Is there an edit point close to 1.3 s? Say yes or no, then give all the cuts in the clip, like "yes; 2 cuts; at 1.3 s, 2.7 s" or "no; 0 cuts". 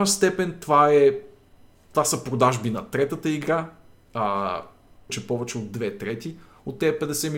no; 1 cut; at 5.1 s